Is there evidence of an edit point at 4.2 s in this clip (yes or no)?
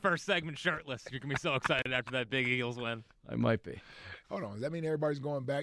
yes